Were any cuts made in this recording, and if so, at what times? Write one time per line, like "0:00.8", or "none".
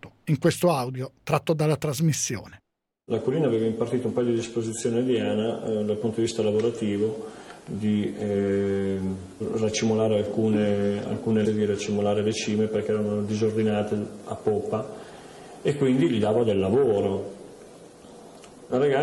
0:11.4